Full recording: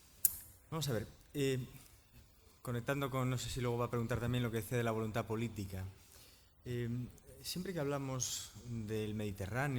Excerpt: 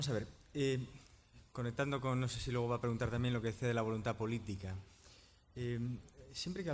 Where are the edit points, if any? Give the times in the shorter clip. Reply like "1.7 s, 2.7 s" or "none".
1.5 s